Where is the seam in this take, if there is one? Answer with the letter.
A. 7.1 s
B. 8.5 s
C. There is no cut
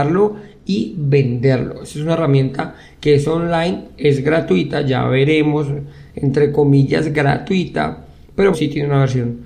B